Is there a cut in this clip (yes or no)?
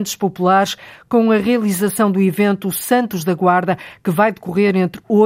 no